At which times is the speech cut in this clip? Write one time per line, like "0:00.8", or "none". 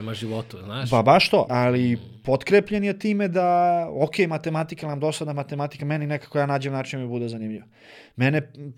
0:01.5